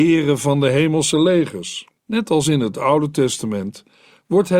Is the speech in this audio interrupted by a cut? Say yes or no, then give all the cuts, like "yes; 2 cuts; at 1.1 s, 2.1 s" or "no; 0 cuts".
yes; 1 cut; at 2.0 s